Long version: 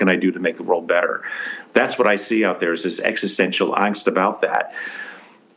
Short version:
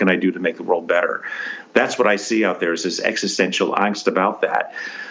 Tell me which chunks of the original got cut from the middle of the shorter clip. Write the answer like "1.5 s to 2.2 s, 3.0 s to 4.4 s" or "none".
none